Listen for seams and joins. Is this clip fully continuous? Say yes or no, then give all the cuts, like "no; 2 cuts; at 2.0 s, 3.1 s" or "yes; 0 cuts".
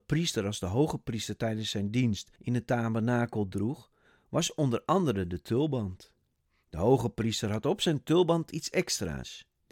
yes; 0 cuts